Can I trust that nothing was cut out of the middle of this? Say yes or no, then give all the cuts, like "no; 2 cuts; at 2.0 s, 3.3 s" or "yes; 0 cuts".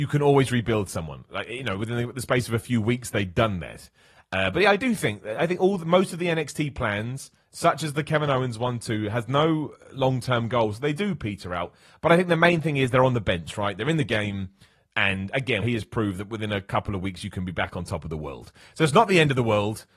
no; 1 cut; at 15.6 s